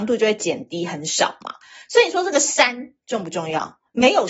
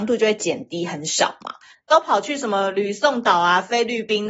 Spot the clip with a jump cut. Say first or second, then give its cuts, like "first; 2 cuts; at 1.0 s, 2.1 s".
second; 1 cut; at 1.7 s